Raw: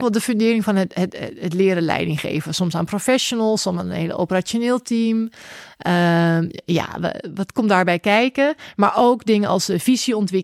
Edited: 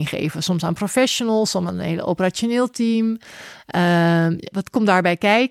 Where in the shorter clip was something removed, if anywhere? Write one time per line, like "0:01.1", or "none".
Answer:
0:04.5